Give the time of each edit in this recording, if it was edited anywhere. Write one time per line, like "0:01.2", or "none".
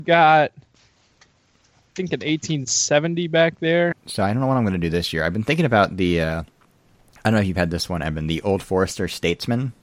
0:03.9